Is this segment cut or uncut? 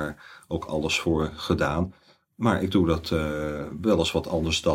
uncut